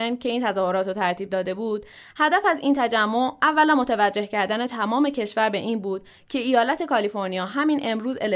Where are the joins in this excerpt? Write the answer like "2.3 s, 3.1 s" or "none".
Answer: none